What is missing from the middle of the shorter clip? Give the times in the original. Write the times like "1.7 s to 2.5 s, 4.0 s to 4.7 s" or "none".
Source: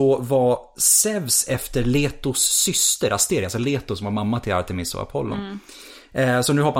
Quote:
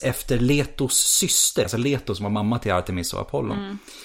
3.1 s to 3.5 s

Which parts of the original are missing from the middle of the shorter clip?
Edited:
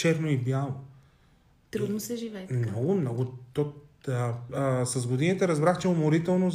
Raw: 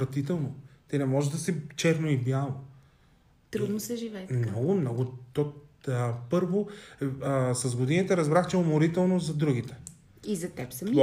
6.3 s to 7.2 s

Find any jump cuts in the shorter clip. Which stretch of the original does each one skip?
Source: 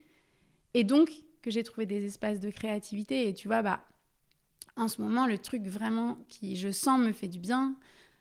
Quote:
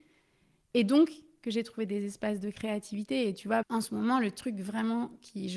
3.6 s to 4.7 s

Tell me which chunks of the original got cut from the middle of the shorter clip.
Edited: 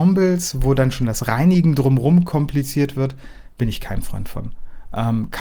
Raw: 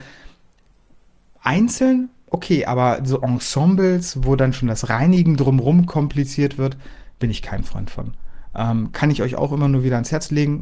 none

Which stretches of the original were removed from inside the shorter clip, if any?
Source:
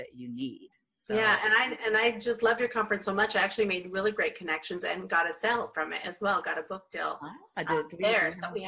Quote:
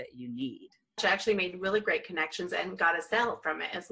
1.0 s to 3.3 s

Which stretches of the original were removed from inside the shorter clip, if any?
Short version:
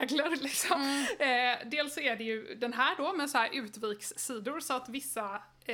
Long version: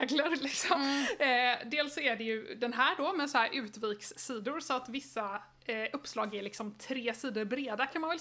none

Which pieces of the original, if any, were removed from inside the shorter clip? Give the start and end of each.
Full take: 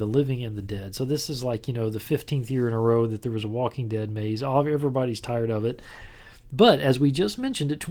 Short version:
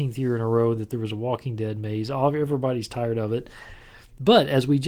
none

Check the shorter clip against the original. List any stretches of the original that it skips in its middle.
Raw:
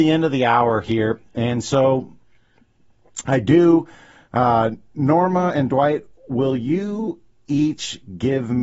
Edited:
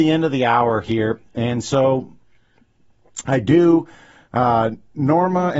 none

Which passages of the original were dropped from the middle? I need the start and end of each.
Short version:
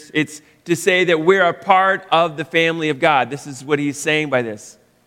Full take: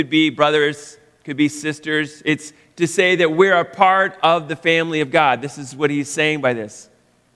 none

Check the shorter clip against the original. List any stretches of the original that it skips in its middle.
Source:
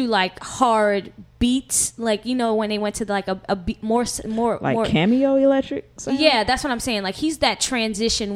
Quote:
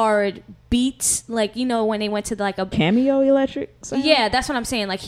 3.4 s to 4.9 s

